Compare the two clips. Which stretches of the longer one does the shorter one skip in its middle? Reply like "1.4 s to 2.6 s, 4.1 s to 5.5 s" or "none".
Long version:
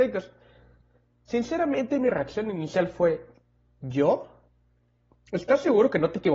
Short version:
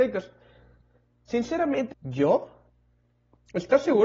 1.9 s to 3.7 s

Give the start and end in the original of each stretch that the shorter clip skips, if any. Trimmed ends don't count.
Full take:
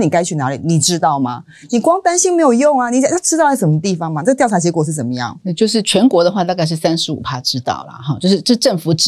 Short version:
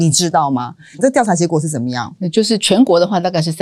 1.7 s to 4.2 s

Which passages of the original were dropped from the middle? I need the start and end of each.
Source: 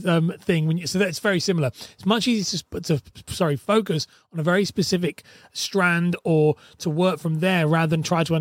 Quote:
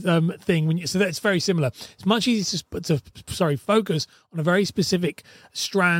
none

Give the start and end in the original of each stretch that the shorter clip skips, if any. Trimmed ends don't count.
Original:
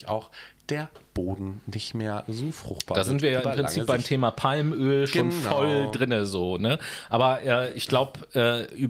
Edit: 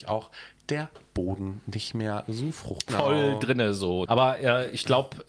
2.9 s to 5.4 s, 6.6 s to 7.1 s

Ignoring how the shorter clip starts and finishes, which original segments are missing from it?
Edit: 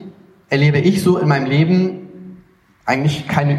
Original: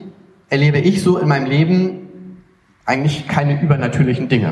none

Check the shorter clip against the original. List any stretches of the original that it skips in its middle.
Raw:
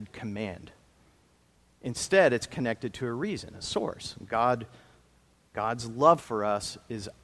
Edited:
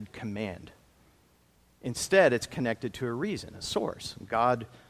none

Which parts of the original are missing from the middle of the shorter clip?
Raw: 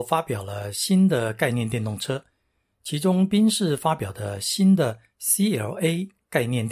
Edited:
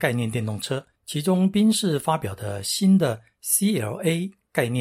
2.3 s to 2.7 s

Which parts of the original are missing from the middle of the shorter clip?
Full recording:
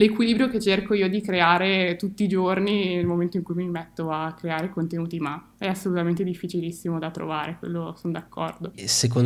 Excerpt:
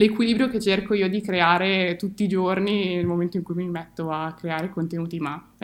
none

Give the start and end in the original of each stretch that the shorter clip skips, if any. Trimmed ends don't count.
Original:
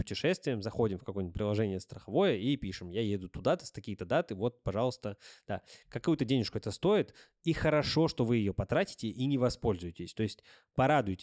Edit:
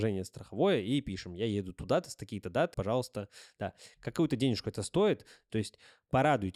4.3 s to 4.6 s, 7.4 s to 10.1 s

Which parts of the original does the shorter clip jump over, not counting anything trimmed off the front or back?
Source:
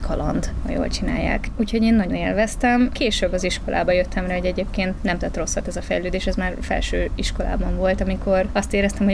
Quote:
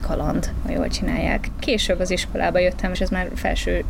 1.6 s to 2.9 s, 4.3 s to 6.2 s

